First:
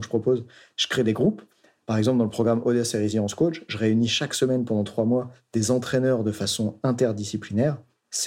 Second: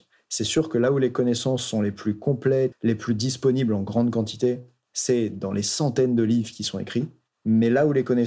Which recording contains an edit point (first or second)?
second